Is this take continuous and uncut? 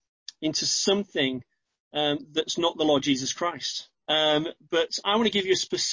no; 1 cut; at 4.0 s

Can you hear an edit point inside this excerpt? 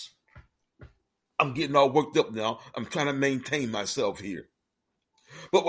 yes; 1 cut; at 1.2 s

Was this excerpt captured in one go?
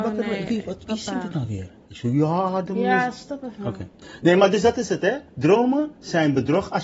no; 1 cut; at 1.9 s

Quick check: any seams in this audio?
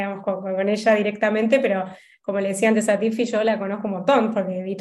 no; 0 cuts

